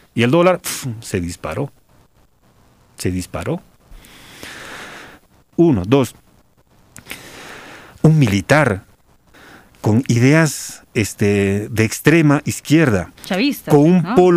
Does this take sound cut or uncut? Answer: cut